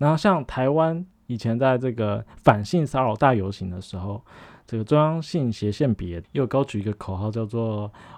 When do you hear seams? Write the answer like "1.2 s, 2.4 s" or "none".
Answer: 3.2 s